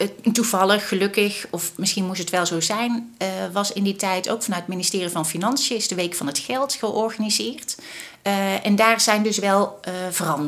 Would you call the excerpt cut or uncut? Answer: cut